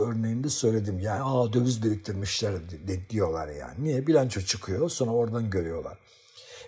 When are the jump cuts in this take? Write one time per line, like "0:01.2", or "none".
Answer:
none